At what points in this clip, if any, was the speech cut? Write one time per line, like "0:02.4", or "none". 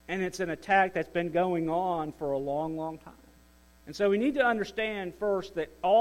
0:03.8